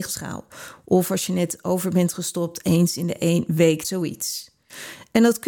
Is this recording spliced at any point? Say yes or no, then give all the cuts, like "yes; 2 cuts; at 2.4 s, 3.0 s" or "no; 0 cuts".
yes; 1 cut; at 3.8 s